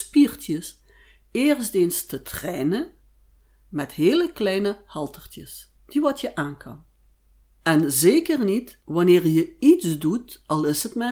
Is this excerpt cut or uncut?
cut